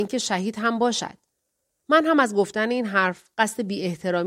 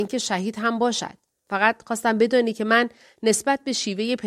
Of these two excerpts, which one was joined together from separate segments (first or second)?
second